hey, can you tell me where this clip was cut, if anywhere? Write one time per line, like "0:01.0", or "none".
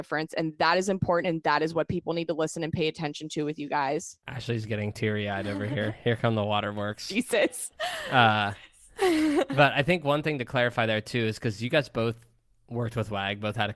none